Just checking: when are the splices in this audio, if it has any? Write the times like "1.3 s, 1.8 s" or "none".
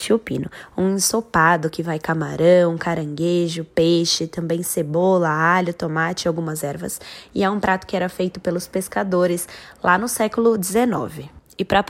none